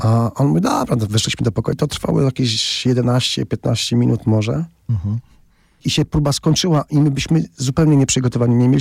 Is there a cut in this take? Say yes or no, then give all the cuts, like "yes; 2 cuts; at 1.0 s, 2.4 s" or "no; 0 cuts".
yes; 1 cut; at 1.7 s